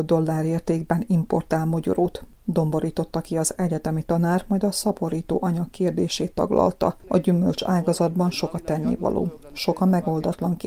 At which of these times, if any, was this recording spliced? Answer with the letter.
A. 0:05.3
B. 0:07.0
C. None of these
B